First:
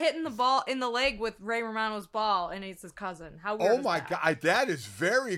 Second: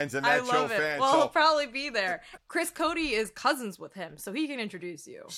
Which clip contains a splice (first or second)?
second